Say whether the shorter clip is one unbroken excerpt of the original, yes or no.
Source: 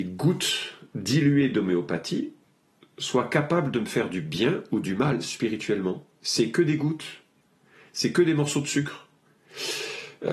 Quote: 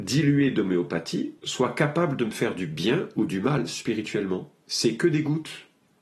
no